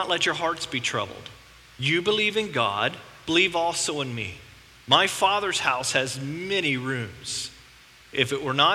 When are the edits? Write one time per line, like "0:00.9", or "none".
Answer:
none